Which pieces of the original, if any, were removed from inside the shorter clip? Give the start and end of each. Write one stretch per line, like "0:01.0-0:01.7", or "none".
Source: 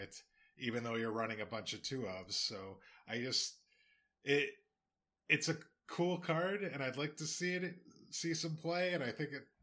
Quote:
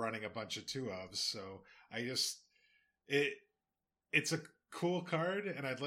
none